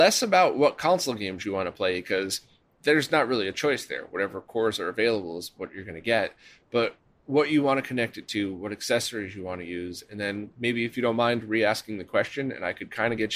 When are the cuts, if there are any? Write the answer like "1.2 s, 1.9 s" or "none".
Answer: none